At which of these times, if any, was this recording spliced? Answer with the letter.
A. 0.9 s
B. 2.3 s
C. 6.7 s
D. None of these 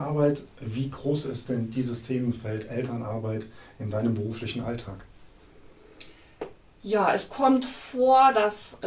D